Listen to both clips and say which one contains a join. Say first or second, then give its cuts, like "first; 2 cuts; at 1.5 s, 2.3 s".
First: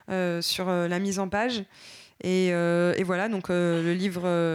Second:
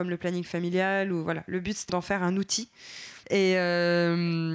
second; 2 cuts; at 1.9 s, 3.2 s